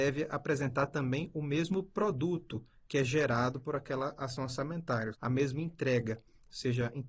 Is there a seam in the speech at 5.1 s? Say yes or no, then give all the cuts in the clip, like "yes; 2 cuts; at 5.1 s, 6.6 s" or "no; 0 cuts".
yes; 1 cut; at 5.1 s